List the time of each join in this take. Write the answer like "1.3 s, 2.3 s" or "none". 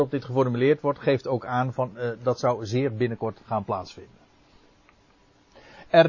none